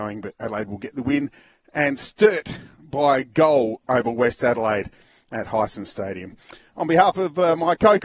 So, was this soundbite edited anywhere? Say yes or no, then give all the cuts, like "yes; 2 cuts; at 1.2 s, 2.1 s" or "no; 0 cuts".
no; 0 cuts